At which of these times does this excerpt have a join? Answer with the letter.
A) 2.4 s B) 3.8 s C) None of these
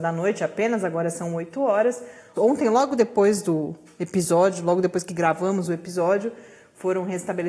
A